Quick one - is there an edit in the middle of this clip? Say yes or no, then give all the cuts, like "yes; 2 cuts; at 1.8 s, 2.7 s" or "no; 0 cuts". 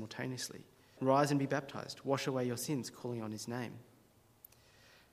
yes; 1 cut; at 1.0 s